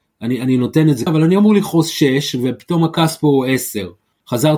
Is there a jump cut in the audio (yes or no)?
yes